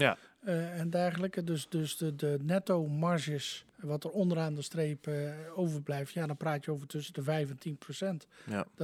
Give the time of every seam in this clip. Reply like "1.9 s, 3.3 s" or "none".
3.7 s

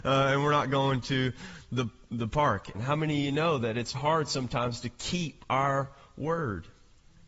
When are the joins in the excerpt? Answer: 2.7 s, 3.9 s

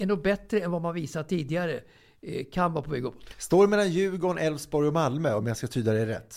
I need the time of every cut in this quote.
none

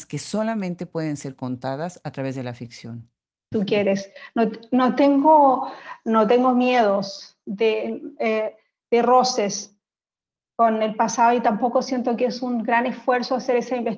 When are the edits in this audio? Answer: 3.5 s

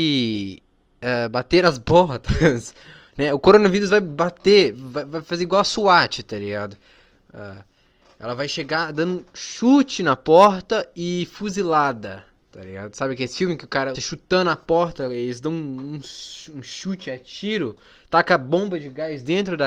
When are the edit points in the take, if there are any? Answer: 13.9 s

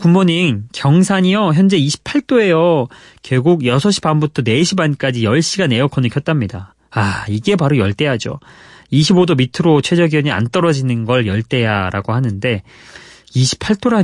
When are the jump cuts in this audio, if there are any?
none

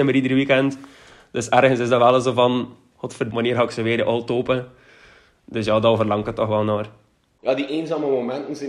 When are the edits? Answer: 3.3 s

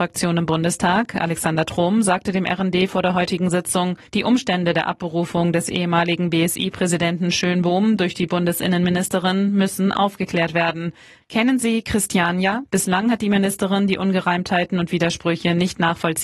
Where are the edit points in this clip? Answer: 4.1 s, 11.2 s, 12.6 s

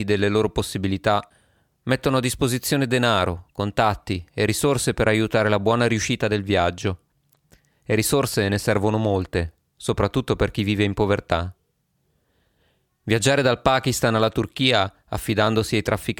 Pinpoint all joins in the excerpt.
none

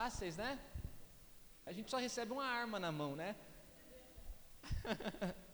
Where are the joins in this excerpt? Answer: 1.7 s

